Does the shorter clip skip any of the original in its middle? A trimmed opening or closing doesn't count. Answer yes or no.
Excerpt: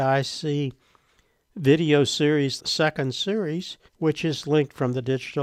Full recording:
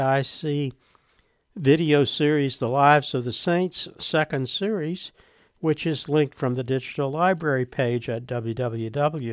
yes